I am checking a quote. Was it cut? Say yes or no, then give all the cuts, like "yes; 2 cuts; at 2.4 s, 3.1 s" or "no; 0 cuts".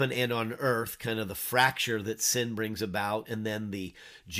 no; 0 cuts